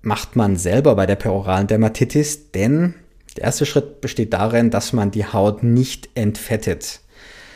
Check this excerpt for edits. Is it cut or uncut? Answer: uncut